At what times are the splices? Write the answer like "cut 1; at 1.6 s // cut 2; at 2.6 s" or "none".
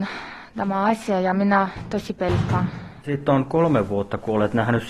cut 1; at 3.0 s